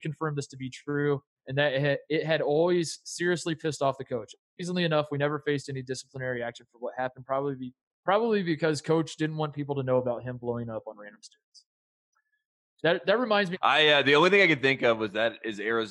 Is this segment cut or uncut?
cut